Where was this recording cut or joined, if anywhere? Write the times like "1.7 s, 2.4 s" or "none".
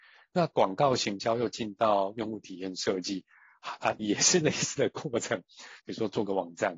4.0 s, 5.8 s